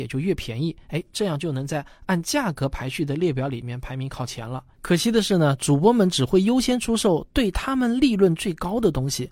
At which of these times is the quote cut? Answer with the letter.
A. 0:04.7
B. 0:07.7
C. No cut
A